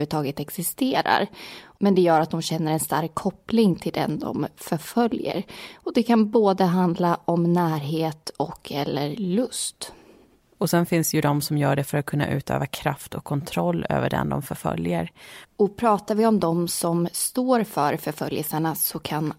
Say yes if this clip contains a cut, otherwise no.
yes